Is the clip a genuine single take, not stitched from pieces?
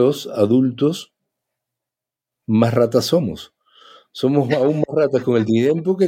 yes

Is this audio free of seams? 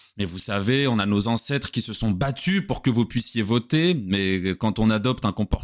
yes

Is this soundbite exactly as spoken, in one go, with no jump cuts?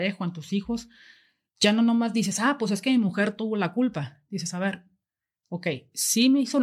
yes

